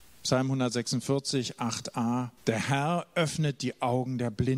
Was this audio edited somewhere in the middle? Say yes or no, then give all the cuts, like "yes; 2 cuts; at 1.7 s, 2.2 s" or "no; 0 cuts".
yes; 1 cut; at 2.4 s